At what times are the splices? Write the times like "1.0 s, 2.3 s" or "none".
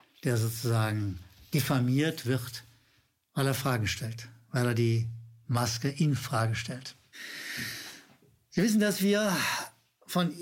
none